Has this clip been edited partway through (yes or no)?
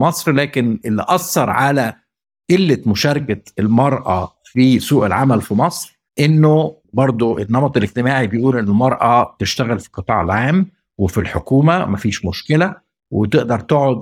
yes